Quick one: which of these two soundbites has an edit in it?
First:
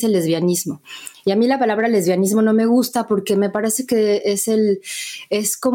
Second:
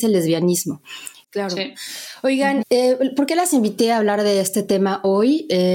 second; 2 cuts; at 1.2 s, 2.6 s

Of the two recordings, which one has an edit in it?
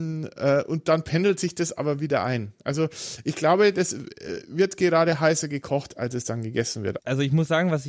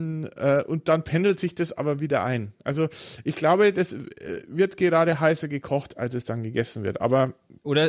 first; 1 cut; at 7.0 s

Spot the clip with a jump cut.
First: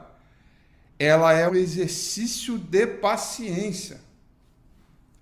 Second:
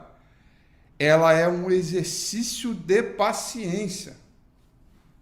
first; 1 cut; at 1.5 s

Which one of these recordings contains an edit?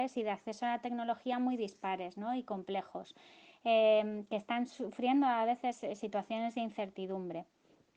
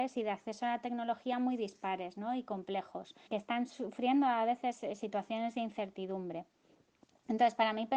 second; 1 cut; at 3.3 s

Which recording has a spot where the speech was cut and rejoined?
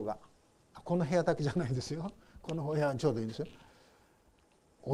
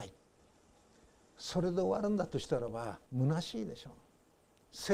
second; 1 cut; at 3.0 s

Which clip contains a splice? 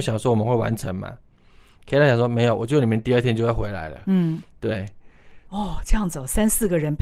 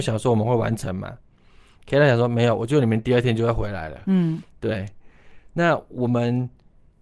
first; 1 cut; at 5.5 s

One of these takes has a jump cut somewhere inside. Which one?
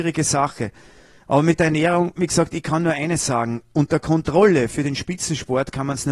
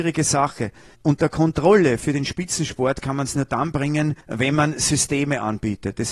second; 2 cuts; at 0.9 s, 4.2 s

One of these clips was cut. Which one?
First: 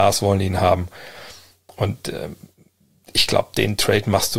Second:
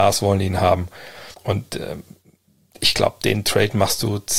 second; 1 cut; at 1.3 s

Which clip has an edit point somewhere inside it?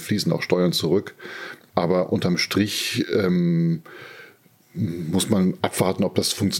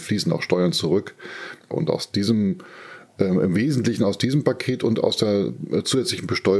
second; 1 cut; at 1.7 s

